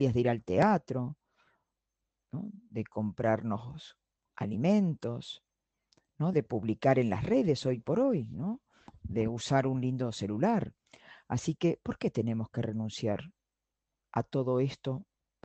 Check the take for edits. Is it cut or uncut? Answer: uncut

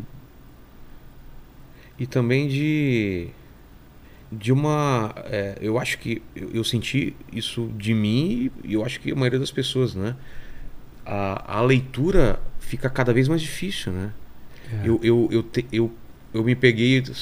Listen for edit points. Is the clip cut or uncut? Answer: cut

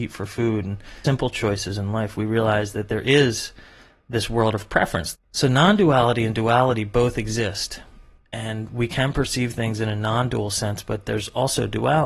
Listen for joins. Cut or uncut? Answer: cut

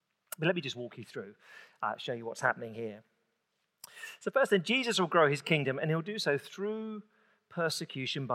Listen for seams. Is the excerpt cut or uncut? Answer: uncut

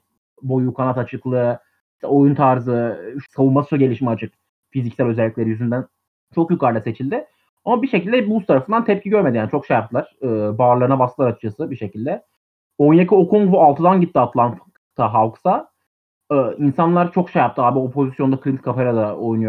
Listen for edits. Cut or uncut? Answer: cut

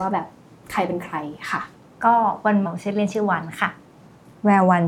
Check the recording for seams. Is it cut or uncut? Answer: cut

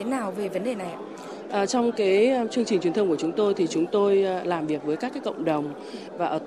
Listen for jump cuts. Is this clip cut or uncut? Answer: cut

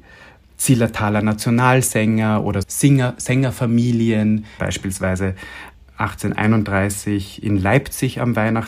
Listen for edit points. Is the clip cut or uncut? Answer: cut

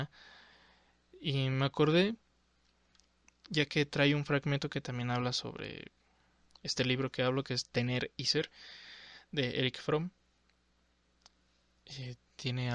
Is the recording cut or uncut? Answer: uncut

